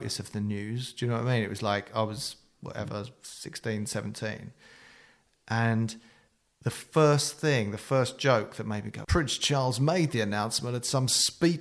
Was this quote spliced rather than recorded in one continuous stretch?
yes; 1 cut; at 9.0 s

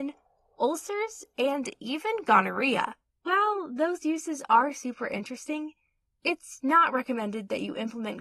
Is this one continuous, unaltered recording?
no; 1 cut; at 3.1 s

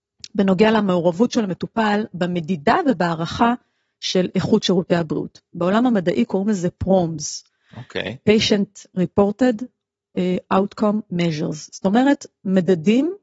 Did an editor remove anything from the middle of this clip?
no; 0 cuts

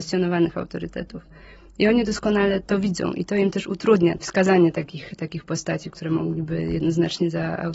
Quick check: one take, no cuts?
yes; 0 cuts

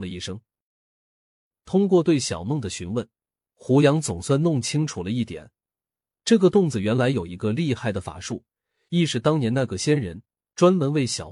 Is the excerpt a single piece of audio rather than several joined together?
yes; 0 cuts

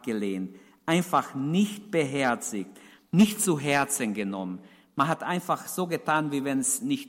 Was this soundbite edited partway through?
no; 0 cuts

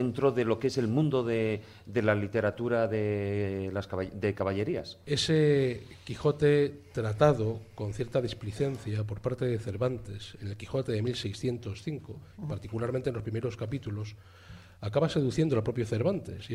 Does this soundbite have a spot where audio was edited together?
yes; 1 cut; at 5.0 s

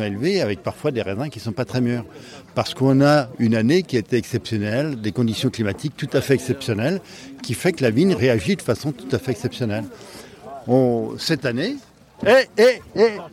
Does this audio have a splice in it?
no; 0 cuts

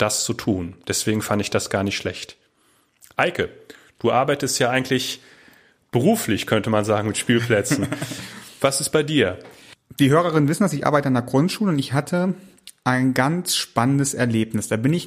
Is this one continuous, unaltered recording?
yes; 0 cuts

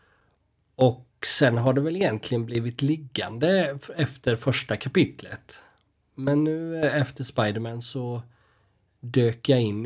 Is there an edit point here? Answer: no; 0 cuts

